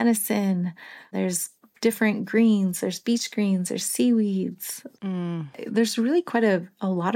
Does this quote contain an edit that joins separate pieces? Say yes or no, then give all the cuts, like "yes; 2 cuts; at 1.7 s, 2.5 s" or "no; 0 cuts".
no; 0 cuts